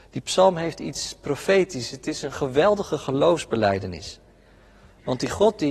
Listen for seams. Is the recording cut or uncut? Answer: uncut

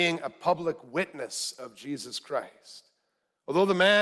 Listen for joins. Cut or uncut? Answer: uncut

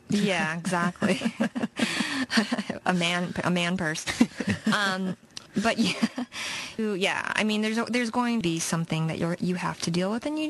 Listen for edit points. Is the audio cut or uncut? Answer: cut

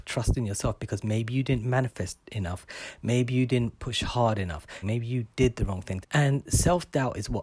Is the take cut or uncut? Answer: cut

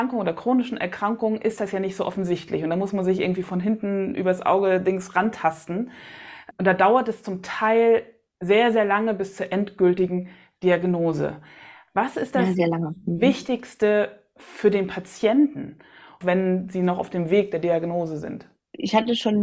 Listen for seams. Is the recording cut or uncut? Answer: uncut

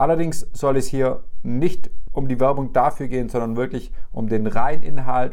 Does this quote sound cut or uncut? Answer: uncut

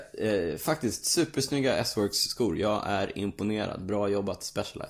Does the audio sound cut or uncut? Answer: uncut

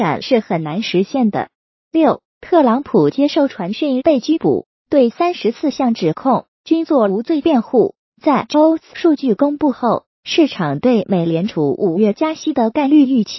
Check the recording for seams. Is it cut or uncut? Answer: cut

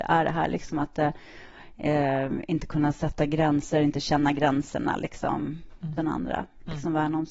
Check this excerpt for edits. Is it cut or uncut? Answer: cut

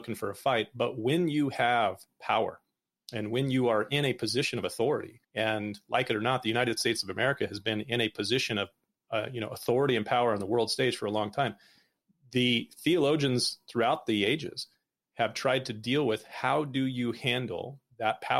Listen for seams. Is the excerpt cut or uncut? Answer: cut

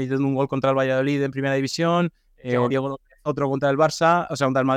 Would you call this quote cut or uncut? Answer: uncut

